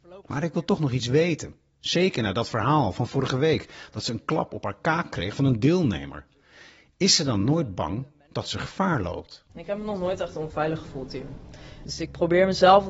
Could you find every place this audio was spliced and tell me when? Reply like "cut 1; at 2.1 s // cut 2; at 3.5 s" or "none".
cut 1; at 9.5 s // cut 2; at 11.8 s